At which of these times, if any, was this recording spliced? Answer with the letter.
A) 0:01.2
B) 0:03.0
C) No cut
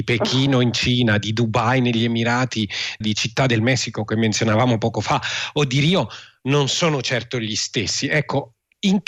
B